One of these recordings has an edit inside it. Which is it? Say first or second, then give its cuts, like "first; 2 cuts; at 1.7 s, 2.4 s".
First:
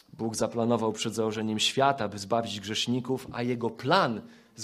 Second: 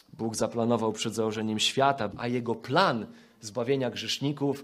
second; 1 cut; at 2.1 s